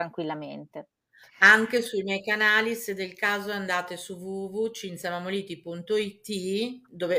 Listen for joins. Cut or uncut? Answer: uncut